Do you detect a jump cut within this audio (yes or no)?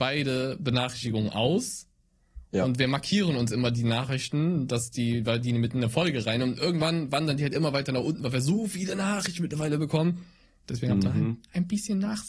no